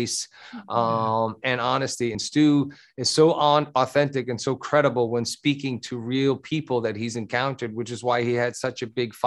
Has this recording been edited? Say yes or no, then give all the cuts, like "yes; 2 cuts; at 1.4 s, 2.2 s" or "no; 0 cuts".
no; 0 cuts